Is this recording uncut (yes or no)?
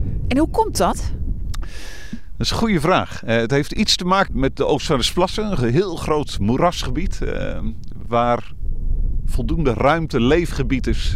no